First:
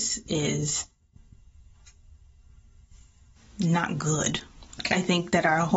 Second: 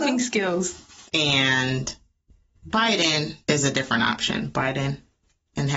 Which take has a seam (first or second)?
second